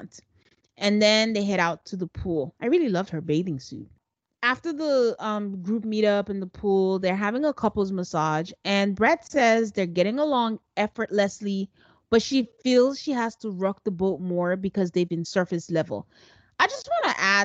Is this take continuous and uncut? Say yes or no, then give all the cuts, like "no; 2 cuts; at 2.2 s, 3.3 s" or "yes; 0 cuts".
yes; 0 cuts